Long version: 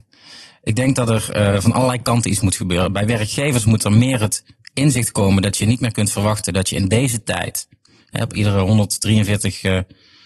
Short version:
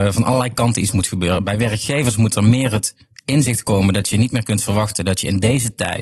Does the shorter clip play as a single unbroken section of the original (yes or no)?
yes